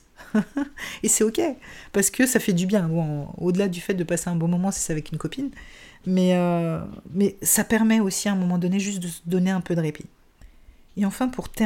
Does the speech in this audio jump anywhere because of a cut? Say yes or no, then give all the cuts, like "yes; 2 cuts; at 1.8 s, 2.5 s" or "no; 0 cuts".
no; 0 cuts